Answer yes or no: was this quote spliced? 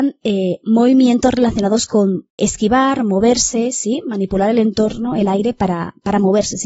yes